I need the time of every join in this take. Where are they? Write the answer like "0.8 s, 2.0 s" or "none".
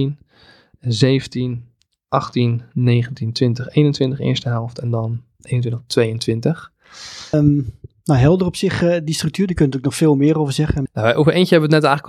7.3 s, 10.9 s

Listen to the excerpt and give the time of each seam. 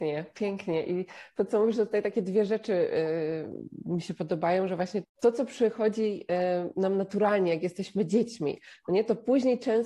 5.0 s

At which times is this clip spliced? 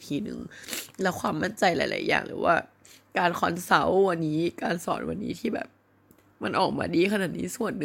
4.2 s

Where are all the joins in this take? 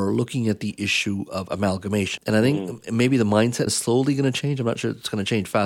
2.2 s, 3.7 s

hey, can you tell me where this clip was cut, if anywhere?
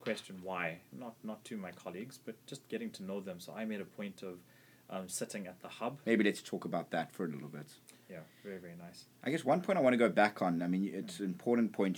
0.9 s, 6.0 s, 8.0 s

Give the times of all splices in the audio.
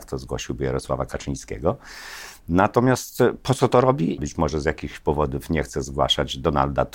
4.2 s

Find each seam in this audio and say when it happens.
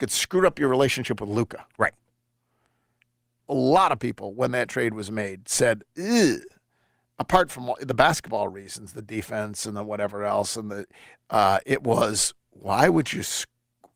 3.4 s

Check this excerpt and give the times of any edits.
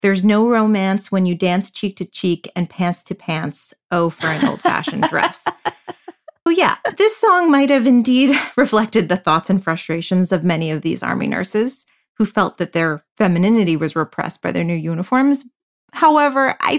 6.5 s

